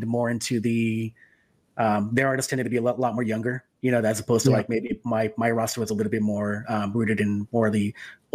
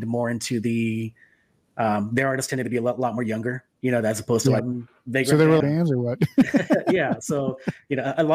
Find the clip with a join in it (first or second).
second